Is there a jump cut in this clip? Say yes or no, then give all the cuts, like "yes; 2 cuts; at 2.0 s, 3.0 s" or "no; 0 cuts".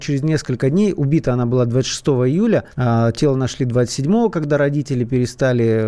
yes; 1 cut; at 2.7 s